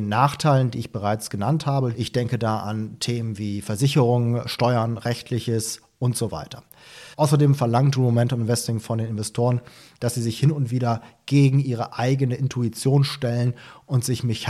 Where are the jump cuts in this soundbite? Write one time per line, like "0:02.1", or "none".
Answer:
0:01.9
0:07.1